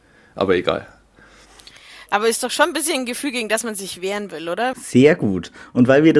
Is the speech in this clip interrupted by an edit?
yes; 1 cut; at 4.7 s

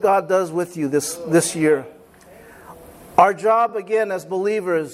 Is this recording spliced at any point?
no; 0 cuts

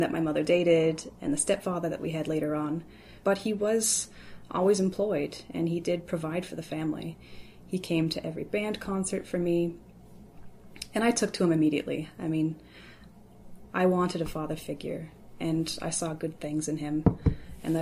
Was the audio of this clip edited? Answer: yes; 2 cuts; at 3.2 s, 13.7 s

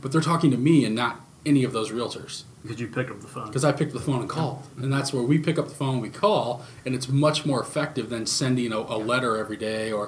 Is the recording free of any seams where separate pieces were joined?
yes; 0 cuts

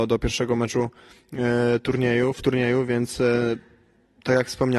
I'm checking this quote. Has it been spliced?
no; 0 cuts

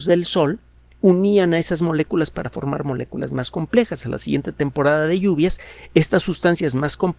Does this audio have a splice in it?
no; 0 cuts

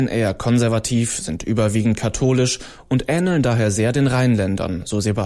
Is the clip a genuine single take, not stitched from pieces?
yes; 0 cuts

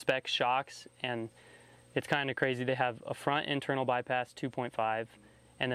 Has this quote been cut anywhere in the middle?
no; 0 cuts

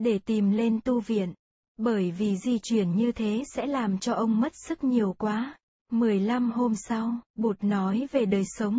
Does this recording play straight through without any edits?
no; 2 cuts; at 5.8 s, 7.3 s

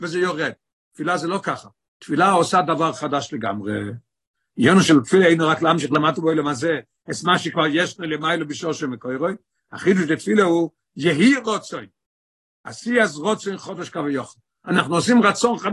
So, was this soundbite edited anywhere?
no; 0 cuts

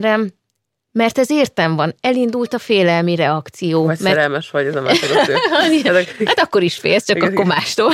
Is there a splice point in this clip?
no; 0 cuts

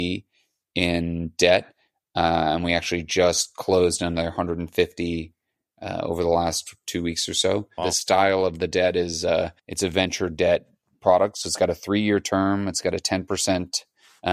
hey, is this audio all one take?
no; 2 cuts; at 7.8 s, 9.6 s

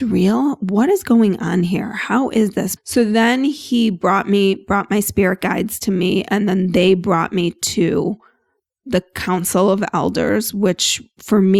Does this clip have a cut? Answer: yes; 1 cut; at 2.8 s

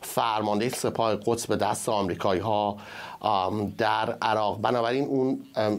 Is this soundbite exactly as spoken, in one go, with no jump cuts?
yes; 0 cuts

